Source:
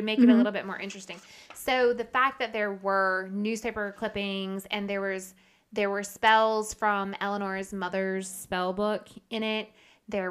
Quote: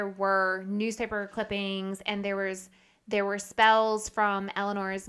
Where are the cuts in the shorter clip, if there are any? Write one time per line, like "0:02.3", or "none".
none